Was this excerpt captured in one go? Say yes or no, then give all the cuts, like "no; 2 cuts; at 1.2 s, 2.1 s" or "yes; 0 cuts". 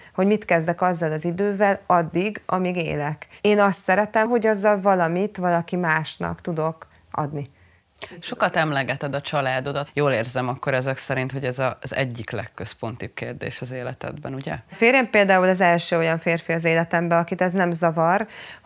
no; 2 cuts; at 4.3 s, 14.7 s